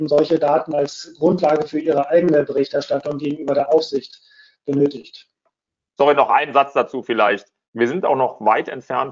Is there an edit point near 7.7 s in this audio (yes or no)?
yes